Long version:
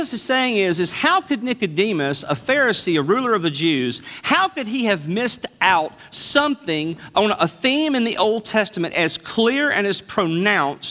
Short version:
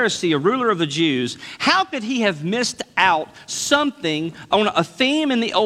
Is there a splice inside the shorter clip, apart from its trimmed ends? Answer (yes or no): no